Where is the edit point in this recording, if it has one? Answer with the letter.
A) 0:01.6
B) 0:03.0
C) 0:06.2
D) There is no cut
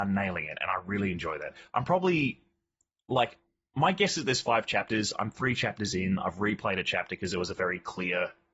D